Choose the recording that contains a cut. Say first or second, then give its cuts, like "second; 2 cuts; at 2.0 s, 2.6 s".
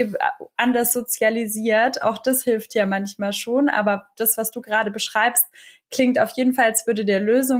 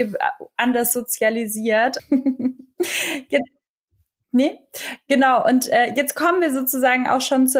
second; 1 cut; at 2.0 s